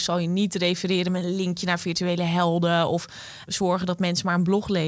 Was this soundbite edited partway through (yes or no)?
yes